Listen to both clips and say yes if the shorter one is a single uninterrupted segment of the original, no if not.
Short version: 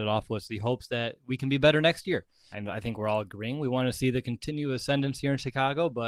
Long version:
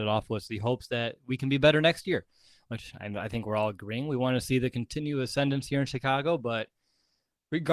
no